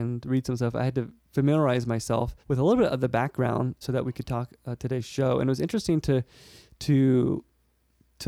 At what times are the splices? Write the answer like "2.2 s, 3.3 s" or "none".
2.4 s, 3.8 s